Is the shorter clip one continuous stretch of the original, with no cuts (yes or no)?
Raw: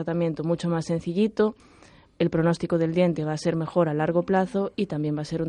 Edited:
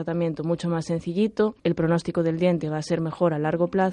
no